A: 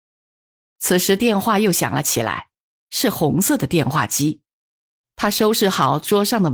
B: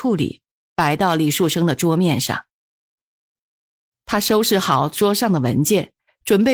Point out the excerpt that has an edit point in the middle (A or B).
A